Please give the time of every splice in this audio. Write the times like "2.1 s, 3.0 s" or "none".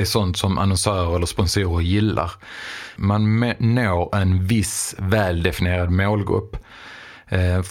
3.0 s

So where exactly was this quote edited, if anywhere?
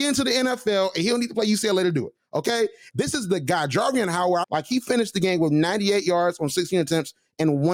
2.9 s, 4.4 s

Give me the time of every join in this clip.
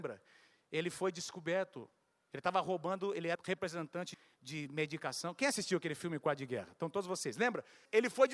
3.4 s

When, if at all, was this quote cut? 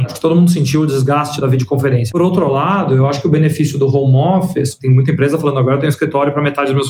2.1 s

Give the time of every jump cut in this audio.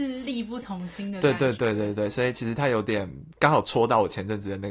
none

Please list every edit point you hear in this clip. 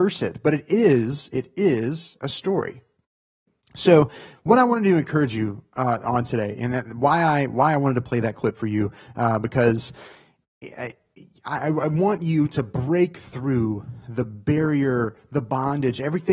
none

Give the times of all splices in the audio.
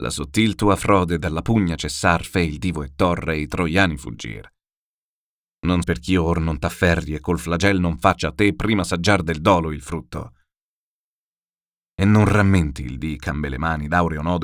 5.8 s

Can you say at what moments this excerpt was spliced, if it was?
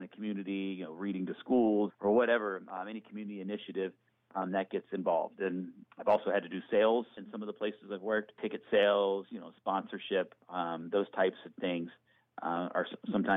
1.9 s, 10.4 s

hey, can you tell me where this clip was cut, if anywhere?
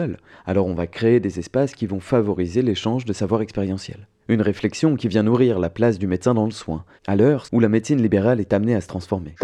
7.5 s

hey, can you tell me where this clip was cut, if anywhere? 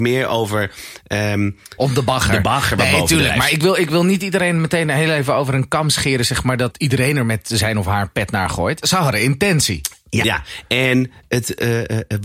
1.8 s, 8.8 s, 10.2 s

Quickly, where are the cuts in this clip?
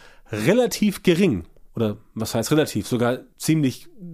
none

